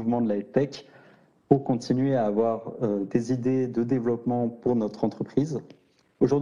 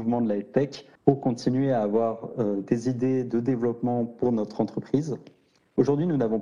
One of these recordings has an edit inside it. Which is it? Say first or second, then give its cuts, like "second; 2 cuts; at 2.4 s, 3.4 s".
second; 1 cut; at 1.0 s